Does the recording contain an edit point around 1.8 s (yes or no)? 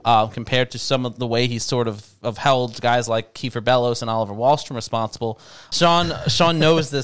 no